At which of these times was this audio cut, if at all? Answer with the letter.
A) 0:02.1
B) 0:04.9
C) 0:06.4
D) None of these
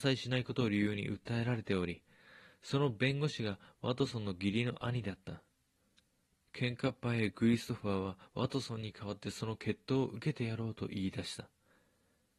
C